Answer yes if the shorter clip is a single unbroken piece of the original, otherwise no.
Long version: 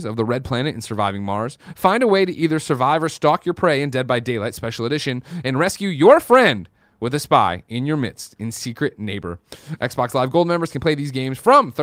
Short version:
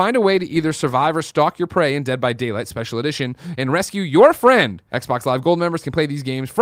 no